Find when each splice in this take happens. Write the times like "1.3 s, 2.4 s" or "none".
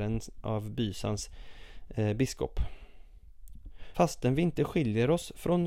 3.9 s